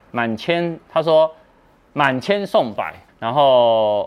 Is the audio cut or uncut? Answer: cut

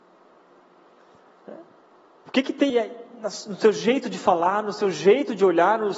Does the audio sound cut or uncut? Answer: cut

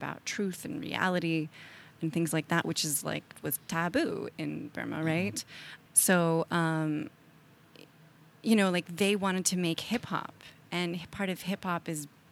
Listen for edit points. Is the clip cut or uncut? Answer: cut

